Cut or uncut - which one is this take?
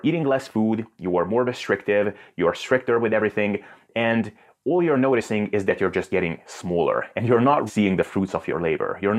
cut